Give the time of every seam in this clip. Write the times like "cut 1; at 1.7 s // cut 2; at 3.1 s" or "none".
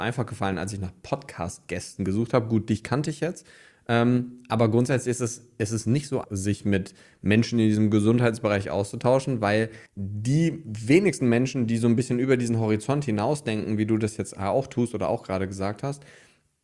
cut 1; at 6.2 s // cut 2; at 9.9 s

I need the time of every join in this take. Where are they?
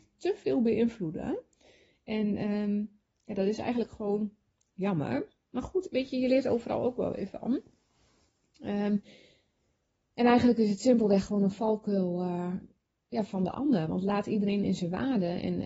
none

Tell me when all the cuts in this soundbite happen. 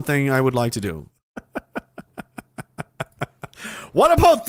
cut 1; at 1.1 s

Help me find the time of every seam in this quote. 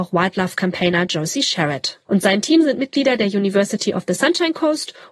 cut 1; at 2.1 s

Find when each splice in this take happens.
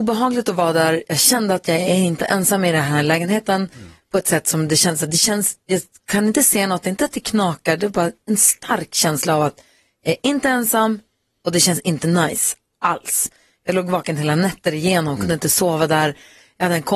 none

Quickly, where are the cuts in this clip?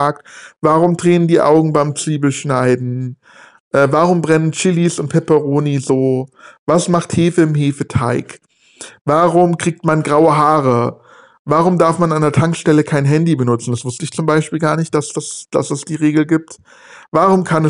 none

